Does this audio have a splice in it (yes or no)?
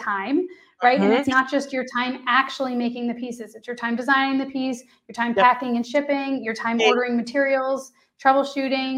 no